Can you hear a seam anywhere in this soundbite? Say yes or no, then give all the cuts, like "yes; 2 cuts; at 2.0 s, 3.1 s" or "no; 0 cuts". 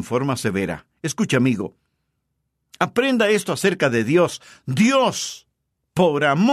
no; 0 cuts